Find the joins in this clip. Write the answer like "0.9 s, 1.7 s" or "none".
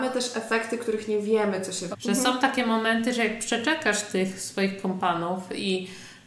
1.9 s